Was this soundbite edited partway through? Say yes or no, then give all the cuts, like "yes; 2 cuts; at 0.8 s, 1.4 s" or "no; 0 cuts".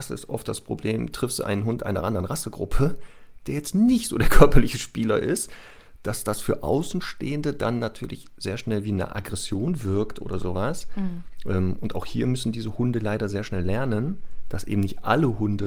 no; 0 cuts